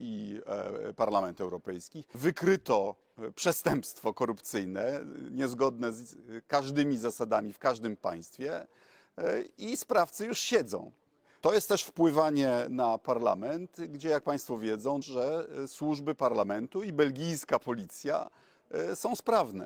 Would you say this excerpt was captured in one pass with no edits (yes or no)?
no